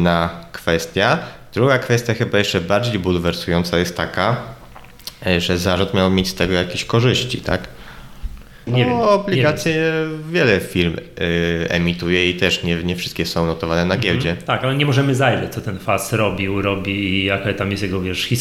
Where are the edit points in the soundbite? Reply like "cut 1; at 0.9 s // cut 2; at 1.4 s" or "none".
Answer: cut 1; at 8.7 s